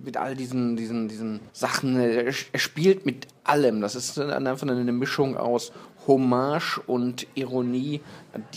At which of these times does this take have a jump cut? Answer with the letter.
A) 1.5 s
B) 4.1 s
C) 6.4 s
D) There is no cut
A